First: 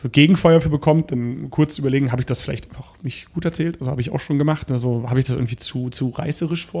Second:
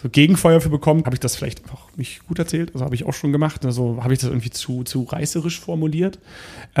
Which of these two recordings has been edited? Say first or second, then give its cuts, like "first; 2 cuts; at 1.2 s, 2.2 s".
second; 1 cut; at 1.0 s